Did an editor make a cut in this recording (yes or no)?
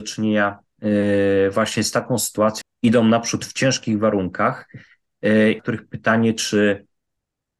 yes